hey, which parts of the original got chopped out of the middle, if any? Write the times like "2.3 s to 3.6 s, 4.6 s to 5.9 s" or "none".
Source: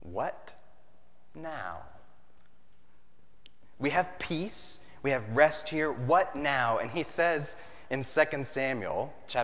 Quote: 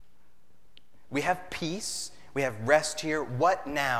none

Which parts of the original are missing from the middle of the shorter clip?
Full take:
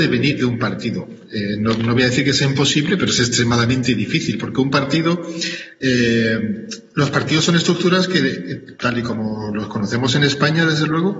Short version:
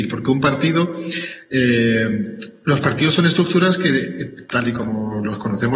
none

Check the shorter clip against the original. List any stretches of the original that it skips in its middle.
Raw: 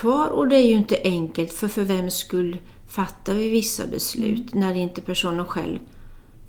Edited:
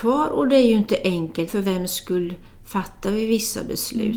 1.5 s to 1.7 s

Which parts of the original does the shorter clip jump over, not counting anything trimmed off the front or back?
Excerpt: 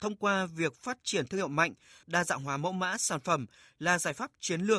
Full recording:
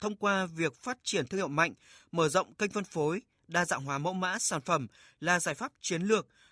2.0 s to 3.4 s

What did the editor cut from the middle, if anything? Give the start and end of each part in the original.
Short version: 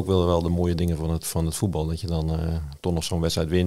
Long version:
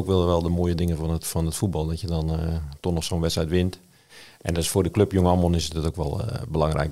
none

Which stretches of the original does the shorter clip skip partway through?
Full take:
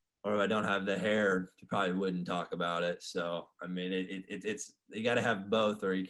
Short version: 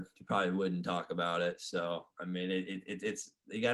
none

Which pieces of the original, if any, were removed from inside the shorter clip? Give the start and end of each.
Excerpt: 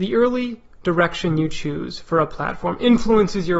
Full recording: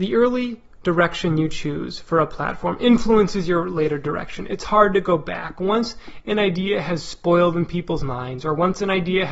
none

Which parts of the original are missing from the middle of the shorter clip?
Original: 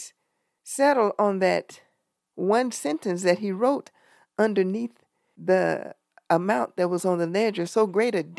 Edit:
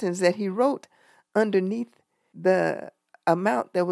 none

